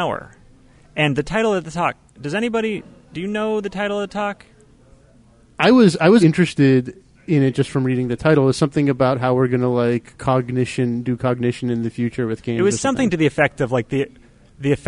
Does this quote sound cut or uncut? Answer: cut